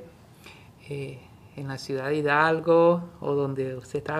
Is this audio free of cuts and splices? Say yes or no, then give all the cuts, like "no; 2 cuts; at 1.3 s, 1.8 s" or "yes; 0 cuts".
yes; 0 cuts